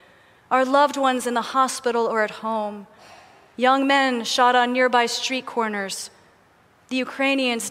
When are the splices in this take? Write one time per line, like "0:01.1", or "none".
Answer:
none